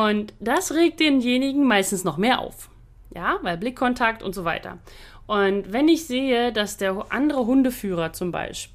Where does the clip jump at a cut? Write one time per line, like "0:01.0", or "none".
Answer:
none